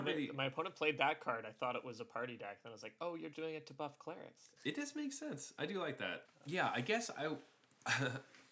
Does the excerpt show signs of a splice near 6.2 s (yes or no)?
yes